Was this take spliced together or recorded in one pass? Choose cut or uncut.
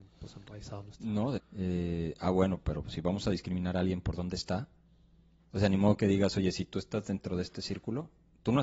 cut